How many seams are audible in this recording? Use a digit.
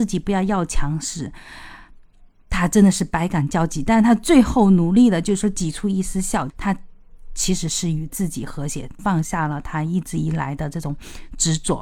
2